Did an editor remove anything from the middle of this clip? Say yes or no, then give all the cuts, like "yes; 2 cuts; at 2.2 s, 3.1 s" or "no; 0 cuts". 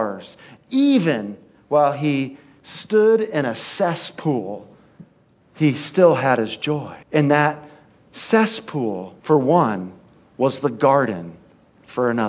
yes; 2 cuts; at 7.0 s, 9.2 s